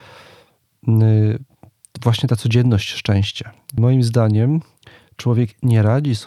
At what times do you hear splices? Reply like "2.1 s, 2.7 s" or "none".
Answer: 3.8 s